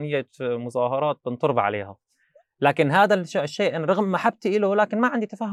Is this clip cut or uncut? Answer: uncut